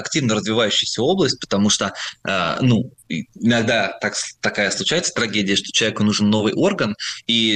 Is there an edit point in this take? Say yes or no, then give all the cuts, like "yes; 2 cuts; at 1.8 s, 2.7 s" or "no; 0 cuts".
no; 0 cuts